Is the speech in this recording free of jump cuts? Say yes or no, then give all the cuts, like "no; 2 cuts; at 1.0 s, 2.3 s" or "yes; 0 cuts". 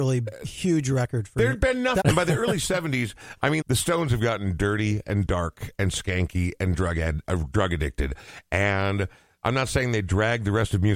no; 2 cuts; at 2.0 s, 3.6 s